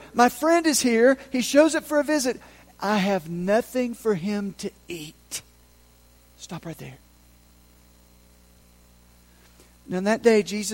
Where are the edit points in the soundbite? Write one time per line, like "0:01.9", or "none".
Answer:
none